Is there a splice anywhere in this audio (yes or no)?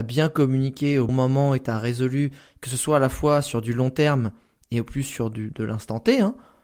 yes